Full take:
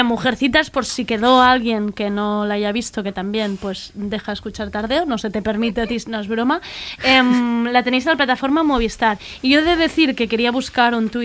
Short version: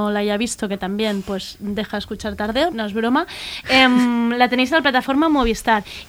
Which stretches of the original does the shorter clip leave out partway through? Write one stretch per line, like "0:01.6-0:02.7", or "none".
0:05.0-0:06.0